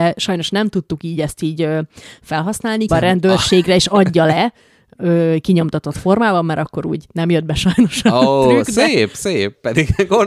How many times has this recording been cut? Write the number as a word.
one